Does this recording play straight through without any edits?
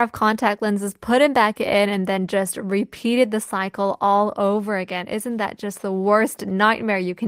yes; 0 cuts

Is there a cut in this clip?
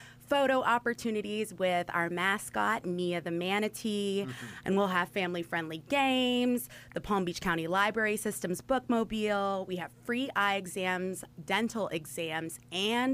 yes; 1 cut; at 4.6 s

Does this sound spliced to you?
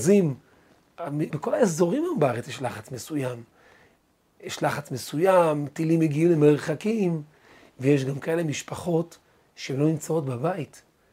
yes; 1 cut; at 1.3 s

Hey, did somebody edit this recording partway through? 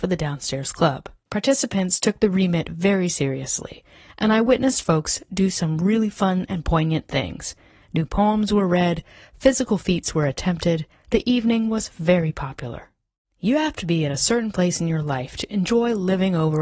yes; 2 cuts; at 1.3 s, 13.2 s

